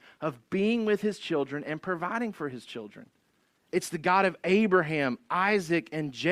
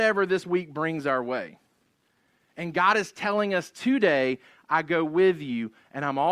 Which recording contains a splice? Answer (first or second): first